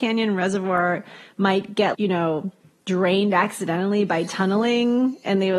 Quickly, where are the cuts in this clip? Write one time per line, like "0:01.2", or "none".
0:01.9

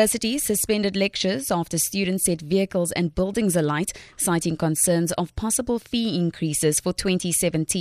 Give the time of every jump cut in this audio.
none

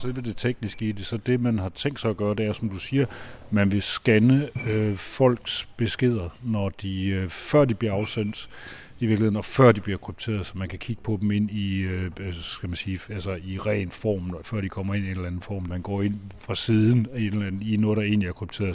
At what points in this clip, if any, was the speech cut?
0:15.7

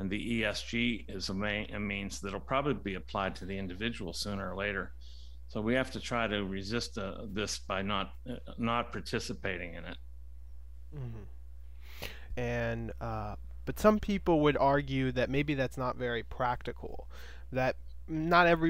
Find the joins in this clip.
0:12.3

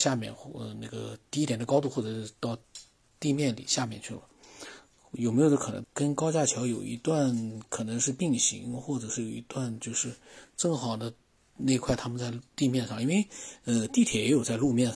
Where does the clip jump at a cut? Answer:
0:05.8

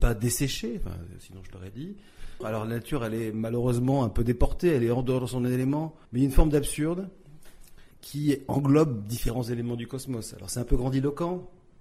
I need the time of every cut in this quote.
0:02.4
0:06.1
0:07.9

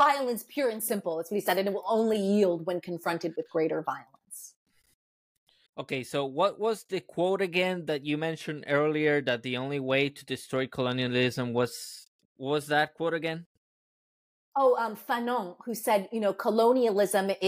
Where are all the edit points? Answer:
0:05.7

